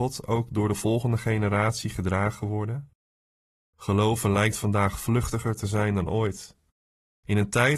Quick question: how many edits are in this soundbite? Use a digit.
1